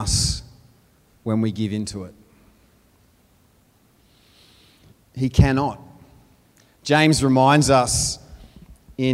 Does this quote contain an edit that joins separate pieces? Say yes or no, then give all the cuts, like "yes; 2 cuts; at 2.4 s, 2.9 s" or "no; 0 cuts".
yes; 1 cut; at 4.9 s